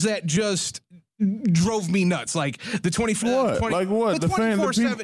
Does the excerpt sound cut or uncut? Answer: cut